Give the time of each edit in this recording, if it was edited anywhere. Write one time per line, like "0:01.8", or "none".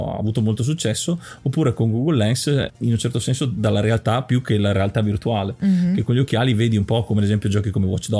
0:02.7